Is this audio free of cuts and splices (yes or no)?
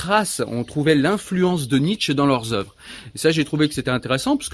yes